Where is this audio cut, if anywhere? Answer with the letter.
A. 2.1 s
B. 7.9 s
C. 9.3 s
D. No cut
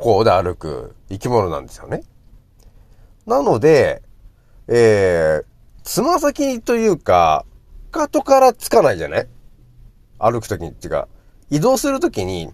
B